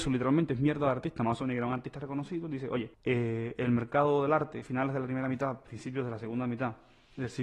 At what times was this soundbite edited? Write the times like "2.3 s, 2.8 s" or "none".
2.9 s, 4.6 s